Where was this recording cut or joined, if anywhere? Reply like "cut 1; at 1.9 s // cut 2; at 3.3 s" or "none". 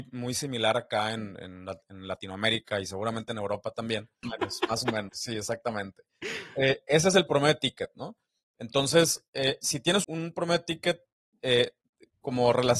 cut 1; at 4.2 s // cut 2; at 10.0 s